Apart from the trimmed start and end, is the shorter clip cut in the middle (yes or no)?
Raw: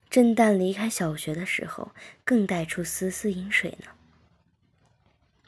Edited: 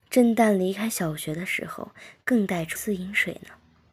yes